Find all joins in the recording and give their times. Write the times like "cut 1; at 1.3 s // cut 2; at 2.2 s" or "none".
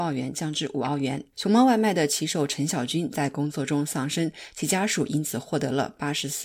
cut 1; at 1.3 s